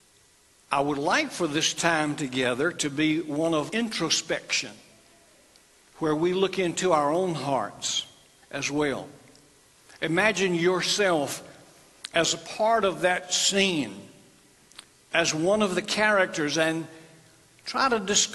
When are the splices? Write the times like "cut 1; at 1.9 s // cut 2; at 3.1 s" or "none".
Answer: cut 1; at 3.7 s